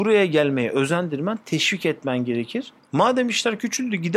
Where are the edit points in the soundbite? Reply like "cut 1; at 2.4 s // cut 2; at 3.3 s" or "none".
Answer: cut 1; at 2.8 s